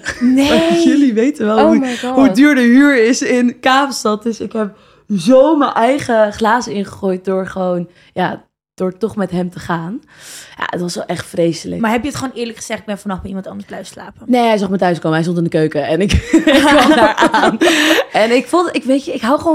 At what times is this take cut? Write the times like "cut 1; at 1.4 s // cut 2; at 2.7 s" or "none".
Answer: none